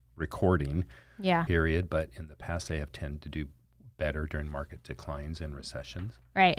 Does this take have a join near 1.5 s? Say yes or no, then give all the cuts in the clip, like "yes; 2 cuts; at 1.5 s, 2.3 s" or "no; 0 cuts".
yes; 1 cut; at 1.5 s